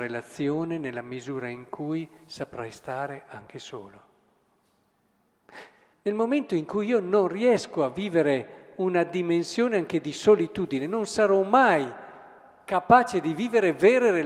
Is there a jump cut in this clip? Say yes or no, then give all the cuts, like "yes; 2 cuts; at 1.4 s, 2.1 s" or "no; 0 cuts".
yes; 1 cut; at 5.9 s